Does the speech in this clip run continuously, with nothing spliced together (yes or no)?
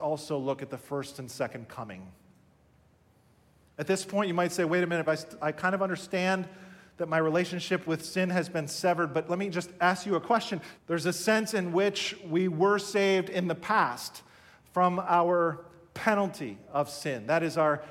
no